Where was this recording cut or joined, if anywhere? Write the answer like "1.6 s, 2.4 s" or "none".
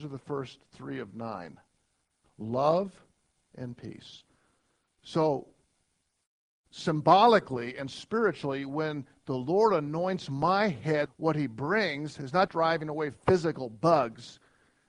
3.4 s, 11.1 s, 12.5 s